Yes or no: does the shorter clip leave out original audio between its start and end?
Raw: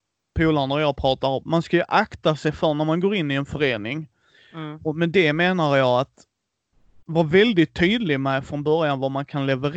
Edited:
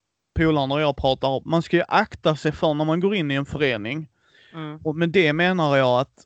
no